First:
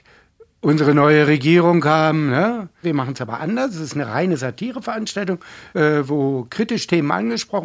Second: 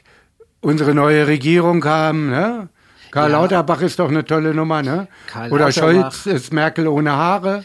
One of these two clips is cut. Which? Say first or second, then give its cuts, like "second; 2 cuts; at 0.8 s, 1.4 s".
first; 2 cuts; at 2.8 s, 5.7 s